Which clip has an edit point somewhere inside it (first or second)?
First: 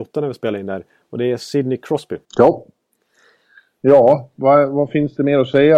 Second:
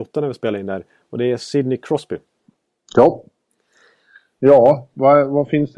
first